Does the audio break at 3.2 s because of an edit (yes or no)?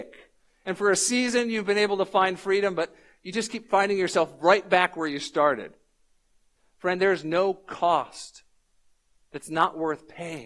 no